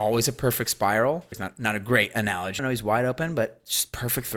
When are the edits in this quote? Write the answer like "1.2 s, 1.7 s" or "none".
1.3 s, 2.6 s